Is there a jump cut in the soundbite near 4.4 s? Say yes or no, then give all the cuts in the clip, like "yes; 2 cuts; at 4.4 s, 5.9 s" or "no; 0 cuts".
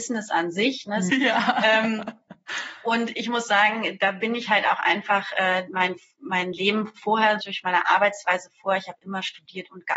no; 3 cuts; at 1.1 s, 5.7 s, 7.4 s